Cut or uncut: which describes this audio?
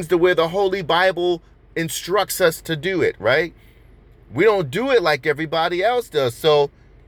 uncut